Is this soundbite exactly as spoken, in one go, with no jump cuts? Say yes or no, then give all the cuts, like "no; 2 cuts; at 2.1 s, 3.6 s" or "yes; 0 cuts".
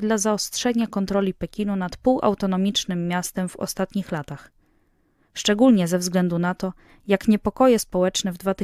yes; 0 cuts